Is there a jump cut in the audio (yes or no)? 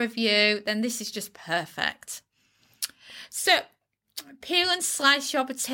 no